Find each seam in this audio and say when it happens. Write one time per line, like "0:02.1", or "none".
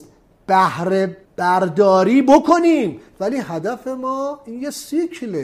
0:01.2